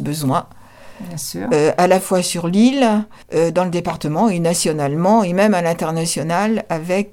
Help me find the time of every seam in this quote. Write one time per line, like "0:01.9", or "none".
0:03.2